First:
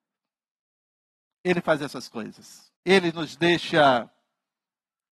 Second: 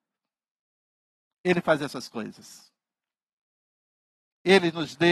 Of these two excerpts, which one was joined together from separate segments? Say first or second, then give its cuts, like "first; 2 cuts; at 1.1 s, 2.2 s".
first; 1 cut; at 2.8 s